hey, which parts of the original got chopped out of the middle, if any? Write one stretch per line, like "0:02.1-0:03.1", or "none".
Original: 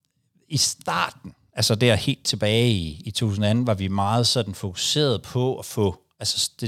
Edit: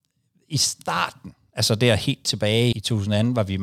0:02.7-0:03.0